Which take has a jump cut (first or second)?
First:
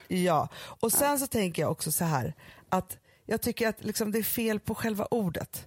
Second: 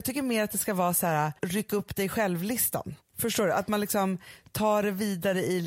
second